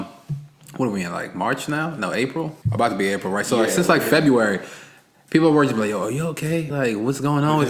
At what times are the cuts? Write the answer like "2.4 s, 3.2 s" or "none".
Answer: 2.6 s, 6.7 s

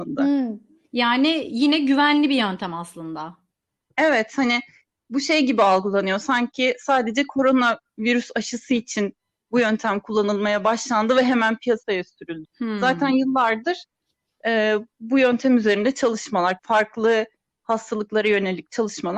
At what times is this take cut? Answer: 12.4 s, 16.6 s

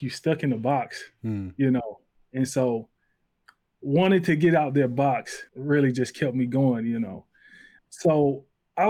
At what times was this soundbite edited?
5.5 s, 7.8 s

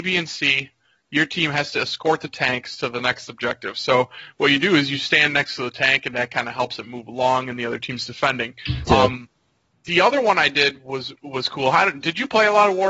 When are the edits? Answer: 8.9 s, 11.1 s

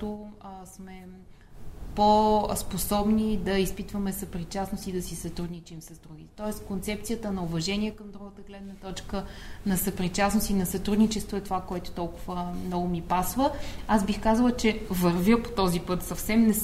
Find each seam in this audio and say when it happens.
none

